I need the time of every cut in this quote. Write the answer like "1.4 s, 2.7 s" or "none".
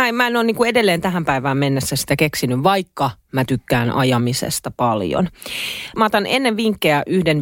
5.9 s